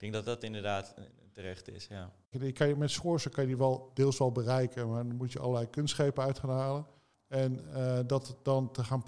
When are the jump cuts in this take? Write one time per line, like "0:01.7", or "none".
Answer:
0:02.3
0:07.1